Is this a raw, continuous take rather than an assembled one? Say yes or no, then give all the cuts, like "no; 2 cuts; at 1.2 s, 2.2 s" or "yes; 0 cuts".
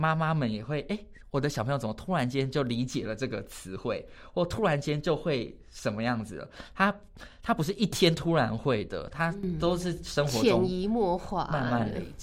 yes; 0 cuts